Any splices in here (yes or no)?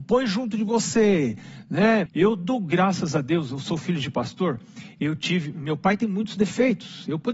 yes